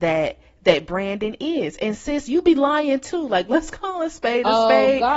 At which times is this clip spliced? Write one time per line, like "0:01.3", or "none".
none